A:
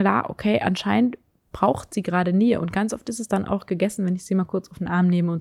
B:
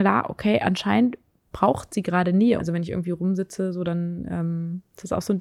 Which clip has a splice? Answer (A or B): B